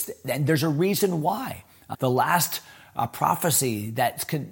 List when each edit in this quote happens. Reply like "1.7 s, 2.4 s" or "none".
1.9 s

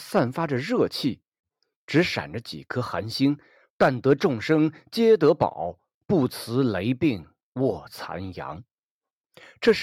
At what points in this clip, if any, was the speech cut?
1.7 s, 3.7 s

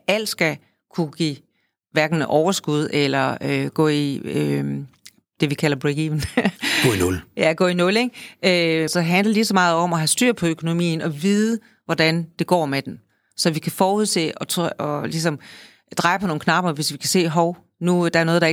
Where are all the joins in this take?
8.9 s

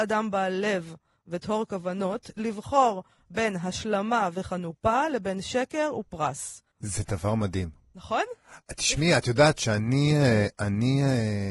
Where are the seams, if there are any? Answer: 6.7 s

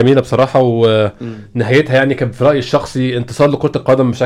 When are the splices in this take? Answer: none

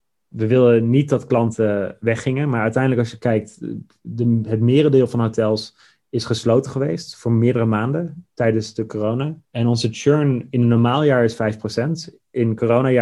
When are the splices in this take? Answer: 9.4 s

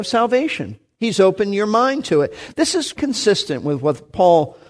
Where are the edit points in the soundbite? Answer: 2.9 s

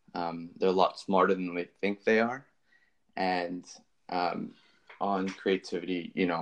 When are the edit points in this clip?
none

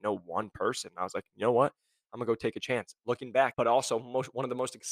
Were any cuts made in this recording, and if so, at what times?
3.5 s

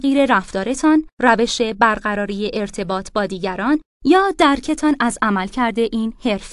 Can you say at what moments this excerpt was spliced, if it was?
1.1 s

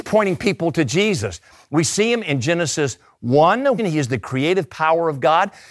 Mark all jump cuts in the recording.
3.8 s

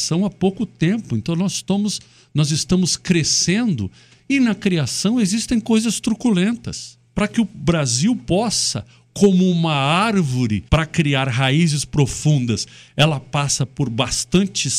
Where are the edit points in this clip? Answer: 7.1 s, 10.7 s

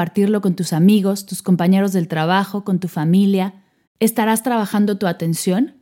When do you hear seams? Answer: 3.8 s

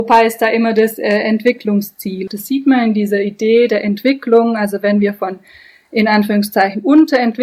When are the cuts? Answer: 2.3 s

